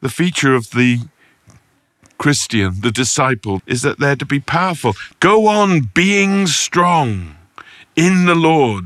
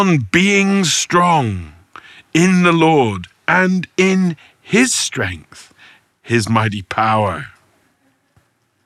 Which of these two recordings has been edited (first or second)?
first